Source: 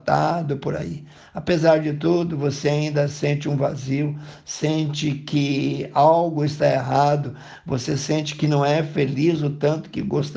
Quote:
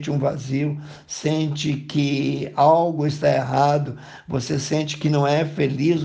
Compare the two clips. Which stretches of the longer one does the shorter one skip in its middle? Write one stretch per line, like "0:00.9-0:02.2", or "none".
none